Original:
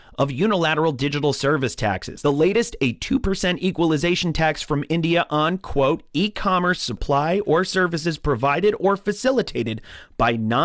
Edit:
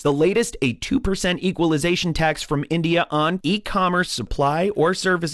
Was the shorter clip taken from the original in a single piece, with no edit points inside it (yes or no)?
no